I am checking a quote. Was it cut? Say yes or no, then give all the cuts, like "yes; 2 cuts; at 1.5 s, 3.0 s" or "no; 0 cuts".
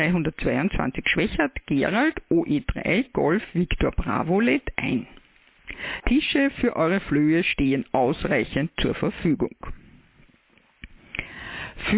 yes; 1 cut; at 6.0 s